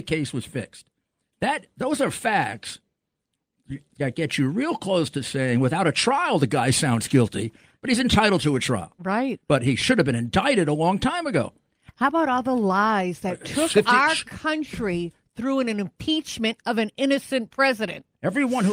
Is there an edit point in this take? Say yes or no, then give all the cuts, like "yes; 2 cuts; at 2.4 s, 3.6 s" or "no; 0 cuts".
no; 0 cuts